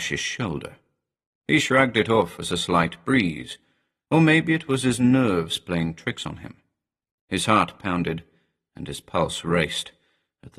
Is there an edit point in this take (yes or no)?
no